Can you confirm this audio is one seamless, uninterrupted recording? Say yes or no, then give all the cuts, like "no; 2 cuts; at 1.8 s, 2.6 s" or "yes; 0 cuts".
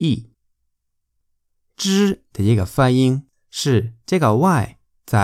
yes; 0 cuts